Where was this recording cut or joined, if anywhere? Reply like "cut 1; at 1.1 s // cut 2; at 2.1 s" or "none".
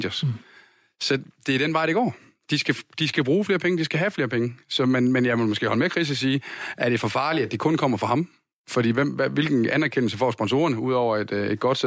none